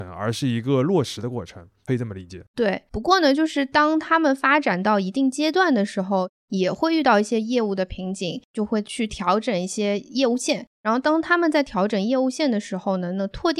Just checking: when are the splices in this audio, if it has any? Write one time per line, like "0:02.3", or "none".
none